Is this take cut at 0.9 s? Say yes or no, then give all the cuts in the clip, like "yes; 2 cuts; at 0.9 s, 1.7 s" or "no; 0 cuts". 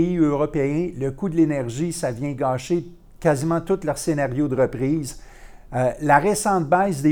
no; 1 cut; at 5.7 s